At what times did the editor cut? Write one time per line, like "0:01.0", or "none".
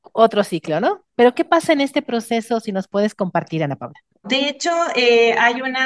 0:01.1
0:04.2